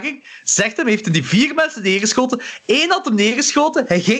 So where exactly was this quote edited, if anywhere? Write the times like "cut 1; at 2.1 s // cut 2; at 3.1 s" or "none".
none